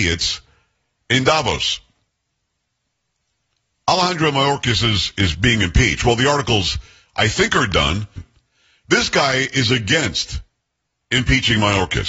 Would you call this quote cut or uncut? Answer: cut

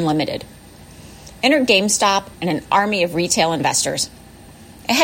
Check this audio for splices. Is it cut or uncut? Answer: cut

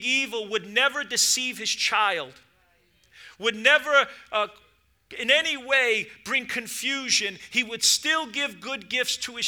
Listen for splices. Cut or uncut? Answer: uncut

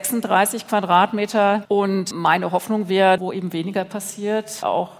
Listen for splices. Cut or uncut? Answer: cut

